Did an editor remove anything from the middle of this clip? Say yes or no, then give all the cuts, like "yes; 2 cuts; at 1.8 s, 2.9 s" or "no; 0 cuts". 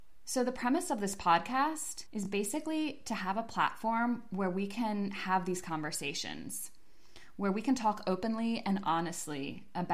no; 0 cuts